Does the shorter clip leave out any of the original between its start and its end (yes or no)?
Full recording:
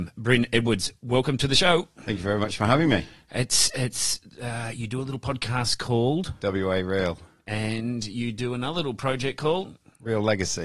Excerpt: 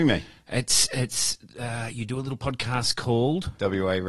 no